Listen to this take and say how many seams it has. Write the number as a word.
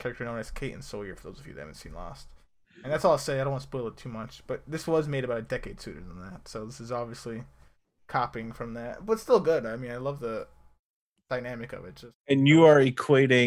zero